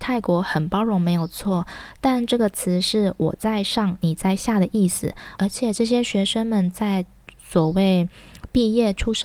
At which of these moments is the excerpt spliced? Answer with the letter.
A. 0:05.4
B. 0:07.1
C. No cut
A